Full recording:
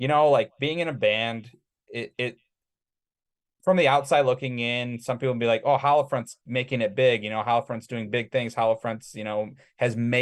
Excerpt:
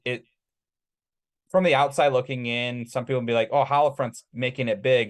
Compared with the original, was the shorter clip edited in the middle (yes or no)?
no